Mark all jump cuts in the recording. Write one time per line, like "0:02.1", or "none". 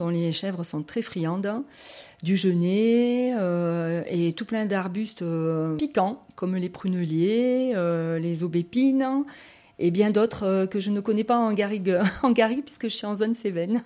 none